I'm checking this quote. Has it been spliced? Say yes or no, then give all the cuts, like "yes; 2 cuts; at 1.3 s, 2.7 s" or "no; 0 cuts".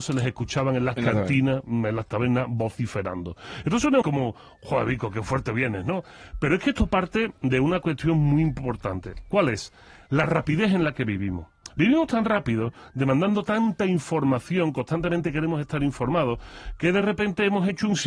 yes; 1 cut; at 4.0 s